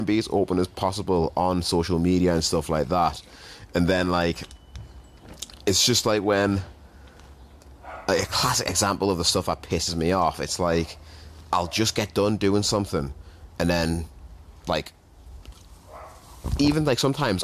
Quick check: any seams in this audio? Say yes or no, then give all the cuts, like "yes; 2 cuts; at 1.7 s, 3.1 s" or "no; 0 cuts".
no; 0 cuts